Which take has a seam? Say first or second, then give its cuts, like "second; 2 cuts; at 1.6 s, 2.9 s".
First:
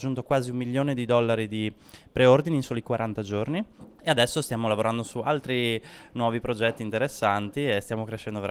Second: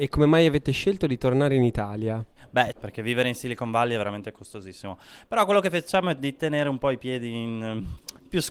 second; 1 cut; at 2.7 s